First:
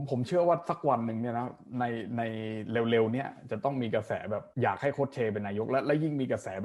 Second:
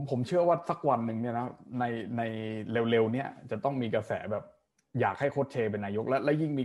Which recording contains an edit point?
first; 1 cut; at 4.5 s

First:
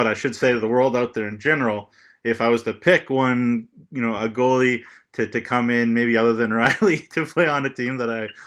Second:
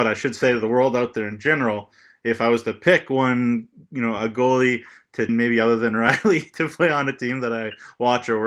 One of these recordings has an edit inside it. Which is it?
second; 1 cut; at 5.3 s

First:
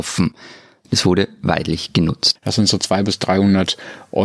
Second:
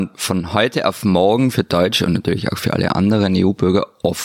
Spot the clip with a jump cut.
first; 1 cut; at 2.4 s

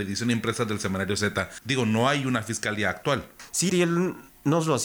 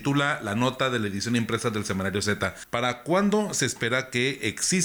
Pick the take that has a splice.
first; 2 cuts; at 1.6 s, 3.7 s

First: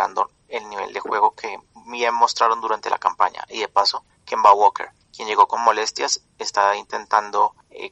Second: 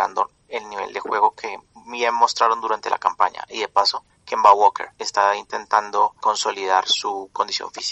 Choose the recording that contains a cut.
second; 2 cuts; at 4.9 s, 6.2 s

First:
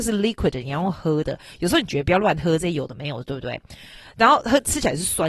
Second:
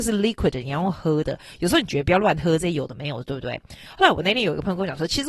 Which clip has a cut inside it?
second; 1 cut; at 3.9 s

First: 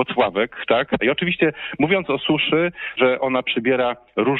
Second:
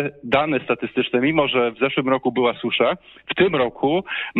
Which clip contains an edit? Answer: first; 2 cuts; at 1.0 s, 3.0 s

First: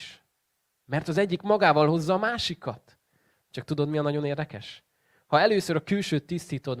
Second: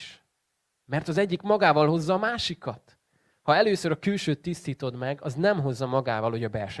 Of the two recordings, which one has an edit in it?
second; 1 cut; at 3.4 s

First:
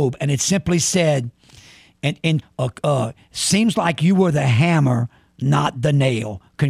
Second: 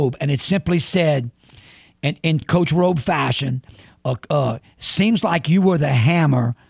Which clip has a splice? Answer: first; 1 cut; at 2.4 s

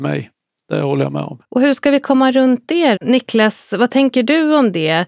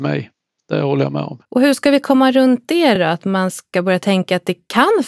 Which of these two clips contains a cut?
first; 1 cut; at 3.0 s

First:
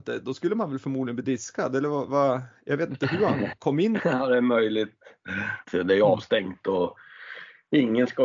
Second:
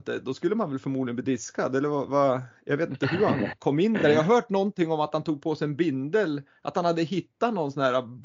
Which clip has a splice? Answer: first; 2 cuts; at 4.0 s, 5.6 s

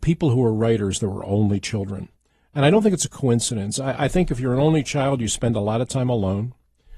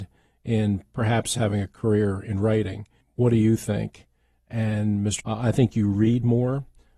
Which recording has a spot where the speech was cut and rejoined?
second; 2 cuts; at 3.0 s, 5.2 s

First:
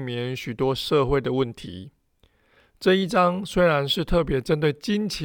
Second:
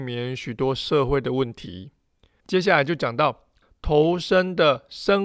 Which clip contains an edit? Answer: second; 1 cut; at 2.4 s

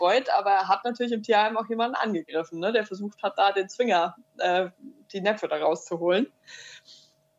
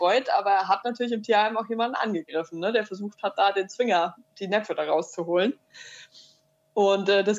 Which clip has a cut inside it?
second; 1 cut; at 4.3 s

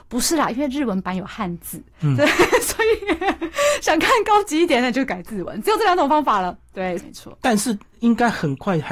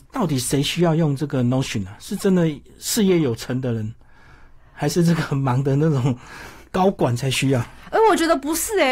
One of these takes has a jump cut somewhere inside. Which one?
first; 1 cut; at 7.0 s

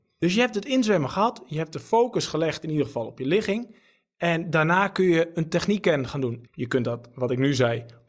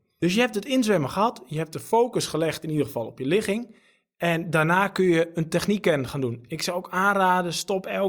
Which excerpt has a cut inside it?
first; 1 cut; at 6.5 s

